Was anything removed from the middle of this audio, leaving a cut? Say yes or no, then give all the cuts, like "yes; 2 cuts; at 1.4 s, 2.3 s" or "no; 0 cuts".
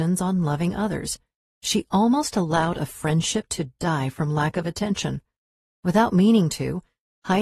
yes; 1 cut; at 1.6 s